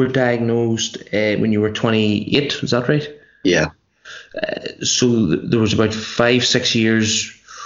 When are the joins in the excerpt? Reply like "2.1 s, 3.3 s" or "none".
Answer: none